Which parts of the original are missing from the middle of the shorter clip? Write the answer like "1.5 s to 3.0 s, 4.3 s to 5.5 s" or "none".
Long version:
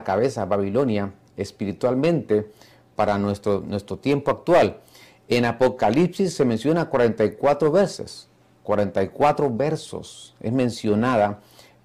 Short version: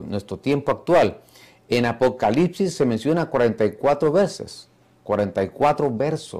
none